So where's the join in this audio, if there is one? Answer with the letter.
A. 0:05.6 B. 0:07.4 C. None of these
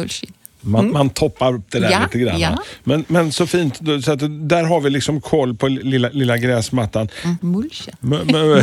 B